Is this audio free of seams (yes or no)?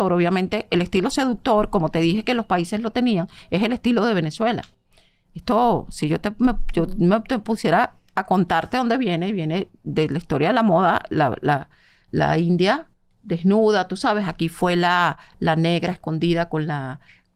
yes